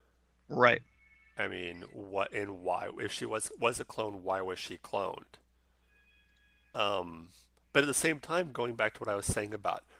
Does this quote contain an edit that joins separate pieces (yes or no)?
no